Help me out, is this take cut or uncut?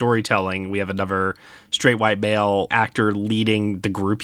cut